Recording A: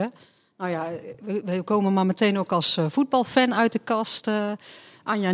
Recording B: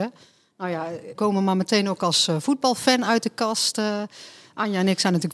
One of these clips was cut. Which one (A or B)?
B